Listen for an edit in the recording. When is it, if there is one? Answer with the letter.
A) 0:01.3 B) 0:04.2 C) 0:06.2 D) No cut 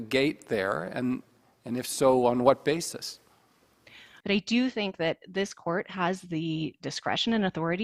B